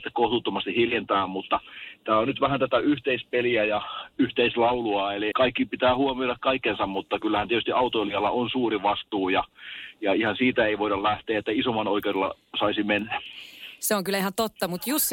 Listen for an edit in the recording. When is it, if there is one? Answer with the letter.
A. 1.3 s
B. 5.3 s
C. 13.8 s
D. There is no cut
B